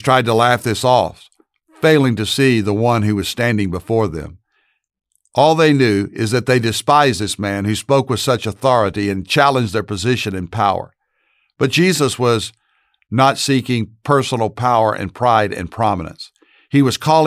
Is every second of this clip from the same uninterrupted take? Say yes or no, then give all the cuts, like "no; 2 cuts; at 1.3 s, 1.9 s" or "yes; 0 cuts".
yes; 0 cuts